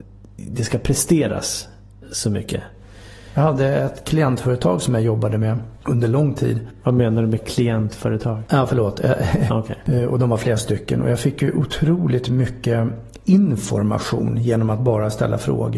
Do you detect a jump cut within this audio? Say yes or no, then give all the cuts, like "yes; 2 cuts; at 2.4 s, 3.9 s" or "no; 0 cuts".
yes; 1 cut; at 9.5 s